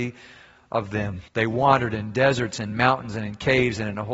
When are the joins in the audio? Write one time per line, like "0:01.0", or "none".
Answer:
0:01.3